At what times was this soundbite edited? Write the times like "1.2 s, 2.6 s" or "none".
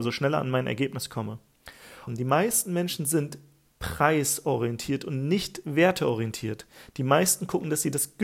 2.1 s